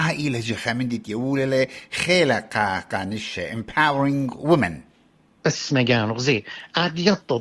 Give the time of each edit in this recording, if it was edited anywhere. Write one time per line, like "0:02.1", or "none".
none